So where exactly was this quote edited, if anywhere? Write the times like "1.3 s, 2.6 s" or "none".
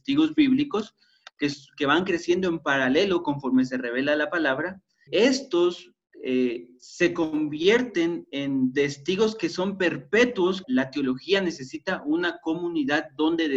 5.1 s, 10.6 s